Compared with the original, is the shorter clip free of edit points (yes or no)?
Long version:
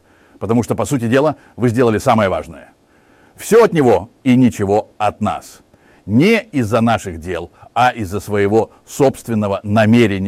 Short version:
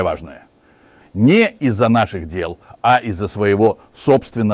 no